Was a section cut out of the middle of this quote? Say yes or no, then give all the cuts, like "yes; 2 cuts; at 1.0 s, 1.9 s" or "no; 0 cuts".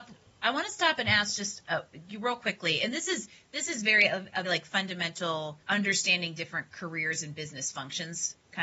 yes; 2 cuts; at 4.4 s, 5.6 s